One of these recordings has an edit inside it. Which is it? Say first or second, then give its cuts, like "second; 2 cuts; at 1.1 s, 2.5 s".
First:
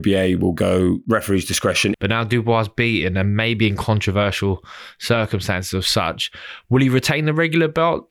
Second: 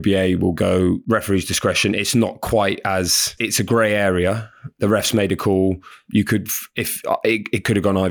first; 1 cut; at 1.9 s